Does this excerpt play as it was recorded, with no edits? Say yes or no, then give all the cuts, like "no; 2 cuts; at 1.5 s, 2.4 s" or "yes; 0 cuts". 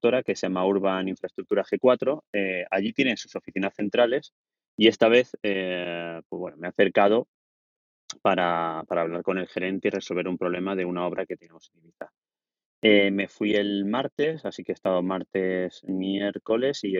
yes; 0 cuts